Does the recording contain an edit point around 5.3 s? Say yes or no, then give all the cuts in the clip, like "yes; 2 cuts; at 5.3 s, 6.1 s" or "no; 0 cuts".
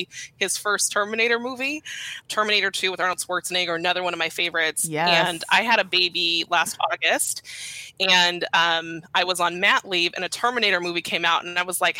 no; 1 cut; at 2.2 s